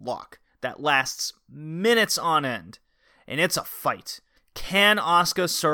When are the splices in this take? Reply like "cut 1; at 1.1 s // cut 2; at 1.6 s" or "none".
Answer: cut 1; at 4.4 s

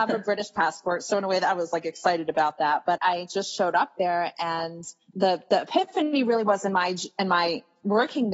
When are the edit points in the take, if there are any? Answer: cut 1; at 3.0 s

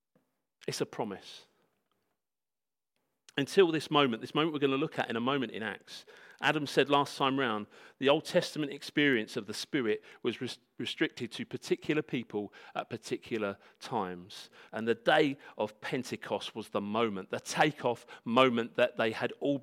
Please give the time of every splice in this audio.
cut 1; at 14.7 s

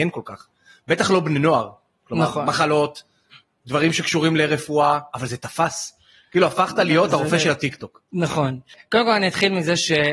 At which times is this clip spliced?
none

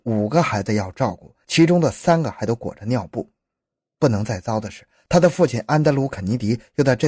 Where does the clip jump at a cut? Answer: none

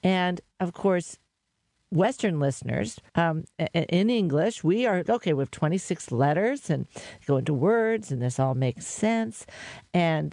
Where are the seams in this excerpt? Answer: cut 1; at 3.1 s // cut 2; at 5.1 s

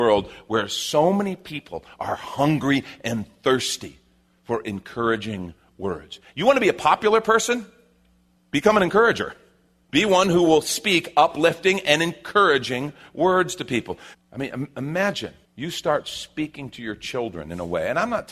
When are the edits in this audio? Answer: cut 1; at 14.1 s // cut 2; at 15.4 s

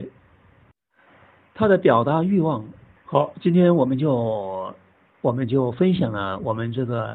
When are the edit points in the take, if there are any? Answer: cut 1; at 3.0 s

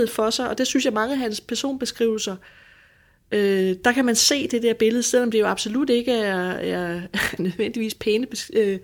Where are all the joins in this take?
cut 1; at 7.4 s

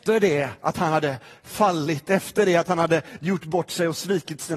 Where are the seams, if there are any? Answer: none

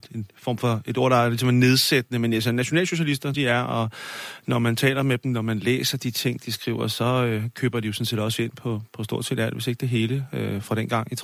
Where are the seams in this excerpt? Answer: cut 1; at 3.3 s

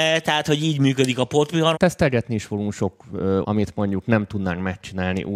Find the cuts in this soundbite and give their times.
cut 1; at 1.7 s // cut 2; at 3.4 s

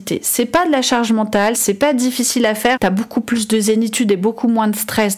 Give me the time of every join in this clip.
cut 1; at 1.5 s // cut 2; at 2.8 s

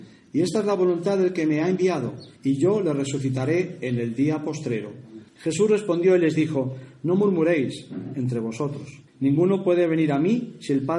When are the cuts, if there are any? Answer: cut 1; at 2.4 s // cut 2; at 5.3 s // cut 3; at 9.1 s

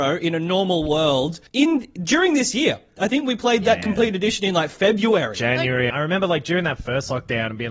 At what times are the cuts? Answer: cut 1; at 1.5 s // cut 2; at 5.9 s

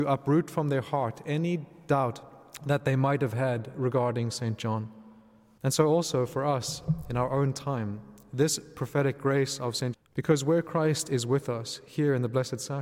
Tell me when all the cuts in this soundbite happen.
cut 1; at 5.6 s // cut 2; at 9.9 s

